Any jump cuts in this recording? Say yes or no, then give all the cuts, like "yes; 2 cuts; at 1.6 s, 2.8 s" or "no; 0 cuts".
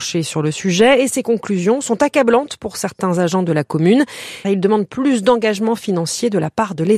yes; 1 cut; at 4.4 s